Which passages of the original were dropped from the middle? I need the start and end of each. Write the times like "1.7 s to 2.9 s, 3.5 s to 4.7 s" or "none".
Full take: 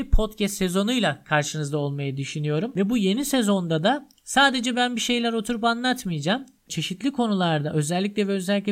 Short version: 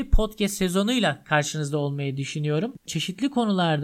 2.7 s to 6.6 s